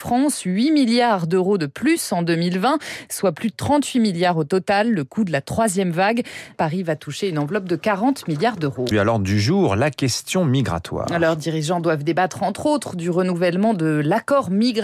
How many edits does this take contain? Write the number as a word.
two